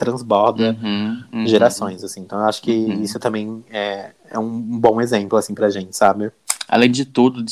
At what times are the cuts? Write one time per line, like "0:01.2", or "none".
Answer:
none